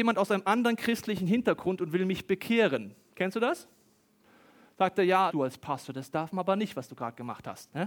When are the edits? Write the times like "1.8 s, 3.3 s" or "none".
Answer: 3.0 s, 5.3 s